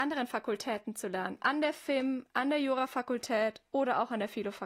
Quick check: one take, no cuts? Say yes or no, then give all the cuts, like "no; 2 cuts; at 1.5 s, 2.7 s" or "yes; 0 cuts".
no; 1 cut; at 1.4 s